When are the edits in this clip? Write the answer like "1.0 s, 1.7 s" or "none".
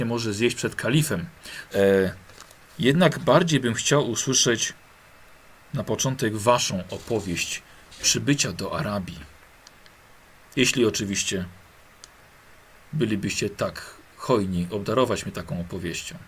1.7 s